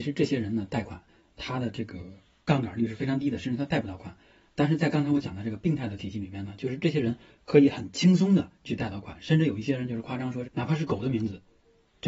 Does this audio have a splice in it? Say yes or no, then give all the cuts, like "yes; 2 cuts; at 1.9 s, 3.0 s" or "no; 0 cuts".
yes; 1 cut; at 10.4 s